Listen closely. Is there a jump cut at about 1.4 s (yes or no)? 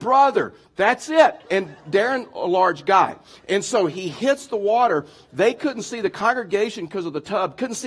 yes